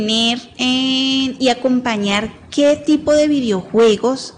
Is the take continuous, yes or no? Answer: yes